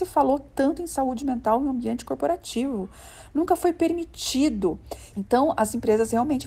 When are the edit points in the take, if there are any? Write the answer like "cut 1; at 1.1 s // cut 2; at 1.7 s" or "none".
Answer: cut 1; at 5.1 s